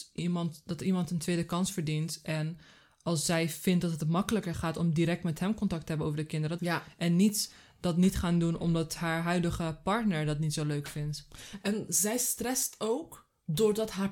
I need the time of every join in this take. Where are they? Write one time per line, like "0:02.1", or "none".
0:06.6
0:11.6